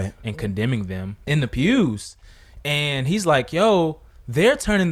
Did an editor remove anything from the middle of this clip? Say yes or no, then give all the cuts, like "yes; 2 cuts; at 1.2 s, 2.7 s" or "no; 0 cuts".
yes; 1 cut; at 1.3 s